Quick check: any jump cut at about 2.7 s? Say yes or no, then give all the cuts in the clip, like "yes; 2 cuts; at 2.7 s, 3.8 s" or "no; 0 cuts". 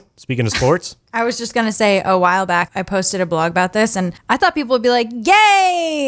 yes; 1 cut; at 2.7 s